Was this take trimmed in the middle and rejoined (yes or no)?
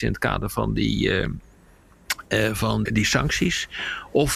yes